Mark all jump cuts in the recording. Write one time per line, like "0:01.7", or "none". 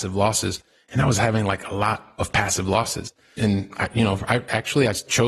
0:03.4